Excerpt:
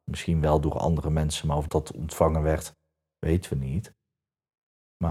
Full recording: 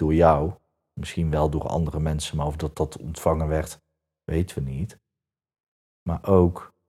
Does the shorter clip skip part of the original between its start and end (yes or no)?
yes